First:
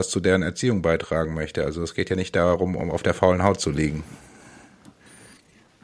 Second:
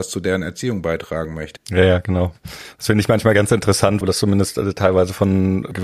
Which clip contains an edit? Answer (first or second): second